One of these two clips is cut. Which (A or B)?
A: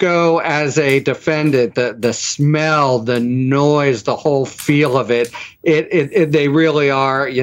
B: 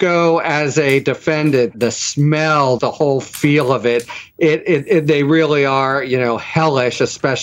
B